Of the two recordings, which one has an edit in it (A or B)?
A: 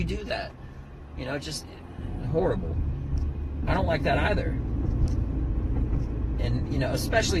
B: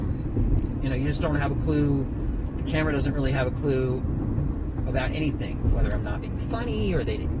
A